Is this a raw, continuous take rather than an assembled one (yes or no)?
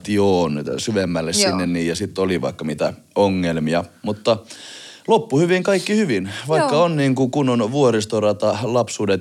yes